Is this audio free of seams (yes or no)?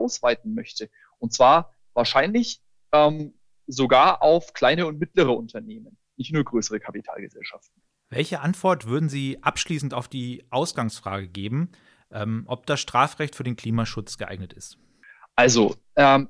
yes